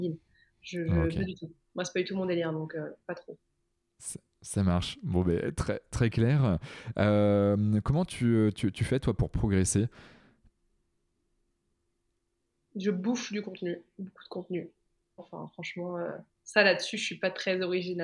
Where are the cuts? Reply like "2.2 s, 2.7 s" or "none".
15.2 s